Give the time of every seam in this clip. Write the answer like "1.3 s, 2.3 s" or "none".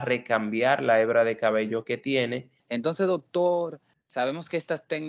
2.6 s, 3.9 s